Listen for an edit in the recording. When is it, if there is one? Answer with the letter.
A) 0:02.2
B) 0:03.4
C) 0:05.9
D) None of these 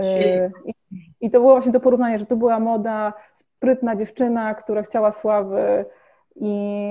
D